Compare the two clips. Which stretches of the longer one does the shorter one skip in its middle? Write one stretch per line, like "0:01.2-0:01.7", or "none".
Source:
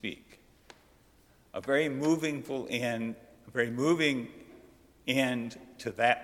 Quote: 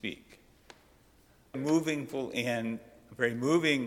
0:01.5-0:01.9